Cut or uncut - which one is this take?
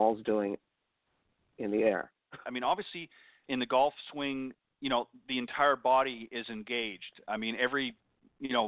cut